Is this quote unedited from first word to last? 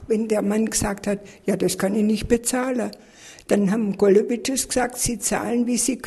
yes; 0 cuts

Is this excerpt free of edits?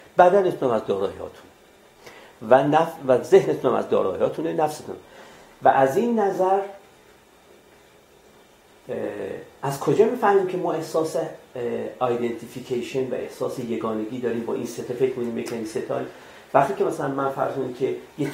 yes; 0 cuts

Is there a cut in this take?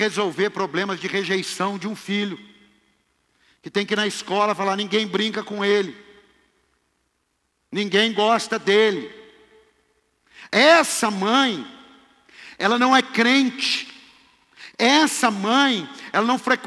no; 0 cuts

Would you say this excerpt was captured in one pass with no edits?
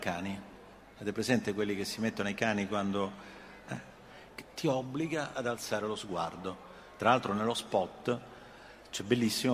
yes; 0 cuts

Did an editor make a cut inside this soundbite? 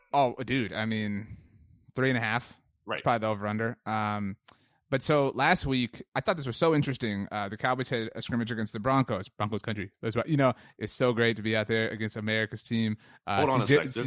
no; 0 cuts

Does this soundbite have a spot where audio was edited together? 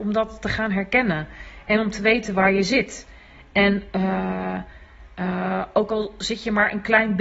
no; 0 cuts

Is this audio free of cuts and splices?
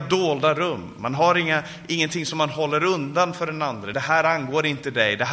yes; 0 cuts

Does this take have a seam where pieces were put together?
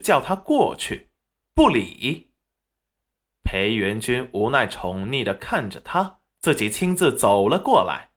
yes; 2 cuts; at 1.5 s, 6.3 s

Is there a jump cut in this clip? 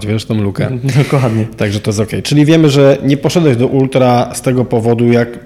no; 0 cuts

